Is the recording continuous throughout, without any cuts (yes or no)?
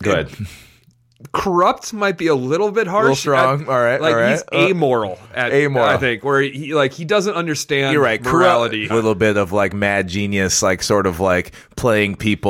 no